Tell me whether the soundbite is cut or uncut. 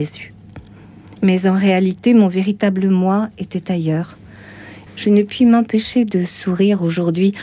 cut